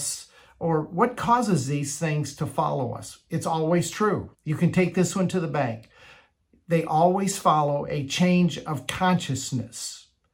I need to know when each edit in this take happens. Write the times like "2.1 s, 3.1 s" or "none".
4.3 s